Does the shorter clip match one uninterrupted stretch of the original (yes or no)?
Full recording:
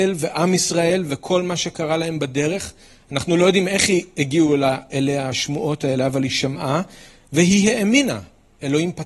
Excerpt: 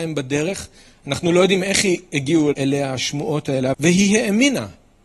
no